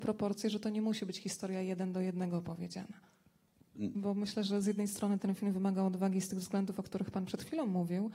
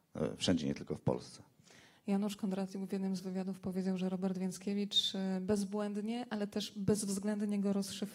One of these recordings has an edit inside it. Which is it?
first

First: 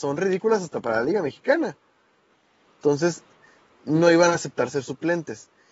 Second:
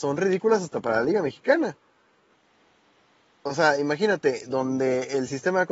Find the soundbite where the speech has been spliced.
first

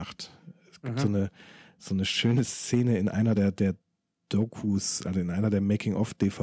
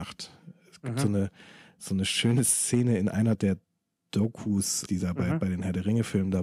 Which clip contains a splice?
second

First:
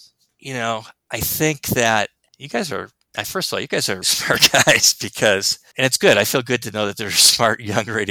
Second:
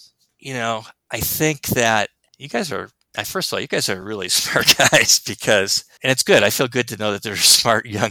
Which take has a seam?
first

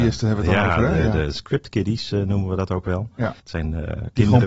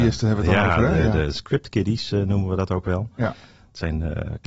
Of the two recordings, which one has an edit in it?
first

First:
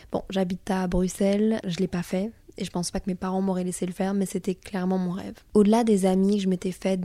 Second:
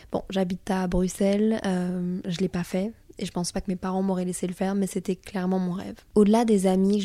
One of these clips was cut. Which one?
first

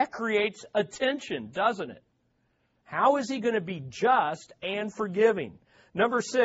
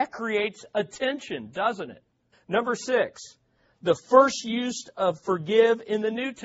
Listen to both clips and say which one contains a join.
second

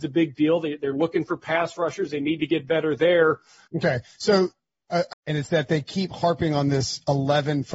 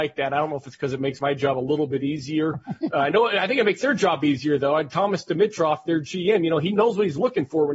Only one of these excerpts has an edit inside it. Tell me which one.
first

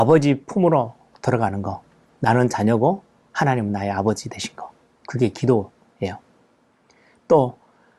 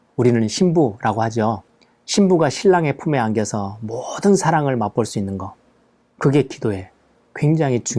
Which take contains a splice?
first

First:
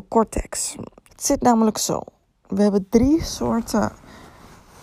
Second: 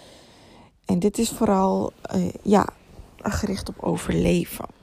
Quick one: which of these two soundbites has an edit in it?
first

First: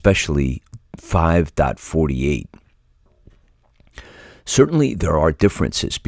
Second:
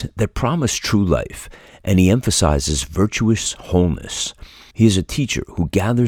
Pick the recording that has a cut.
second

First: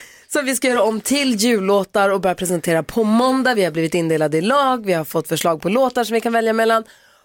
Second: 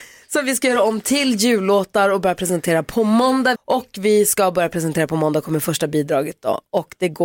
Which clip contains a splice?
second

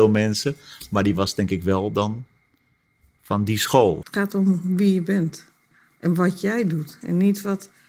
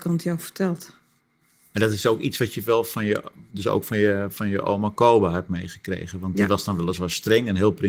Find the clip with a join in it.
first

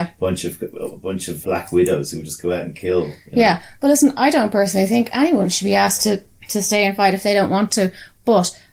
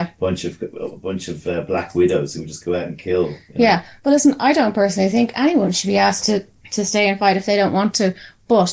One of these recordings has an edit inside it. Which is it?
first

